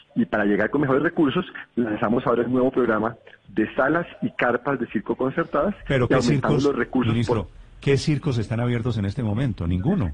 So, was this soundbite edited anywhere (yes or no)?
no